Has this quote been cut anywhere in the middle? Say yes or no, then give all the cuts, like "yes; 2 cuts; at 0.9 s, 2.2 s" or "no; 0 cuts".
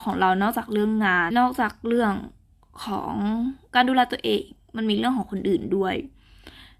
yes; 1 cut; at 1.3 s